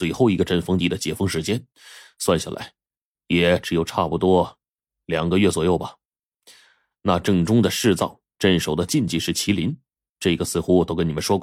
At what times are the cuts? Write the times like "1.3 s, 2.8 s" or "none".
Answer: none